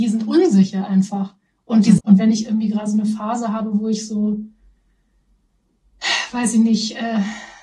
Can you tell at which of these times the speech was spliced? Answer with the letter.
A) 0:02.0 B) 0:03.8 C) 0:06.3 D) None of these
A